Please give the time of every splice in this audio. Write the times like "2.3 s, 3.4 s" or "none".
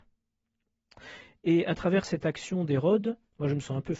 none